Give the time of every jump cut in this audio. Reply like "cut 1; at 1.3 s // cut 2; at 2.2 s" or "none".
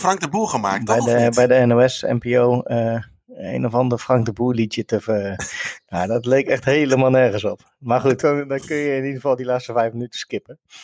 cut 1; at 8.2 s

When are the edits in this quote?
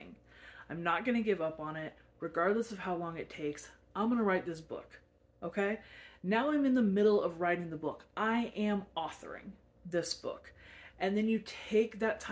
none

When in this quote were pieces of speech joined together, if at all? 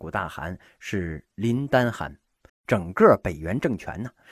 cut 1; at 2.5 s

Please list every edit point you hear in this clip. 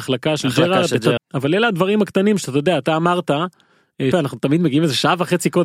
cut 1; at 1.2 s // cut 2; at 4.1 s

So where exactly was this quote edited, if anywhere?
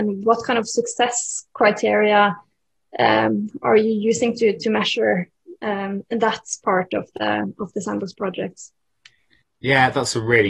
none

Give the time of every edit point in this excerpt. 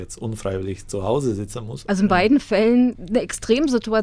cut 1; at 1.8 s

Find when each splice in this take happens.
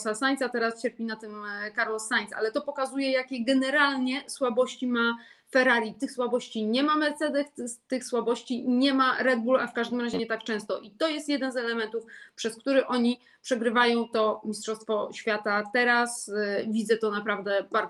none

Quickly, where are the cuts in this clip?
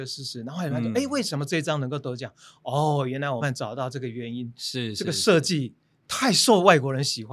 cut 1; at 3.4 s

